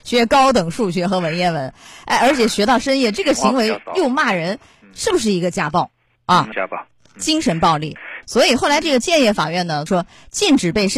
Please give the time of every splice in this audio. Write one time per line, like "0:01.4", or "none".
0:06.5
0:08.2
0:09.9